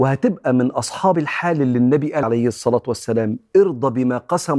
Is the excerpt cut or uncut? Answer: cut